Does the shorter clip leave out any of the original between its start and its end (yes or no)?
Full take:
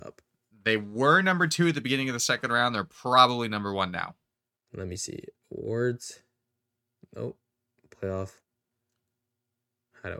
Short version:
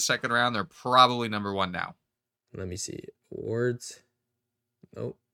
no